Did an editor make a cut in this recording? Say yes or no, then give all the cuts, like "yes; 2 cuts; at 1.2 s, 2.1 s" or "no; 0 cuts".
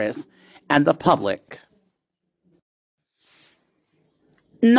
no; 0 cuts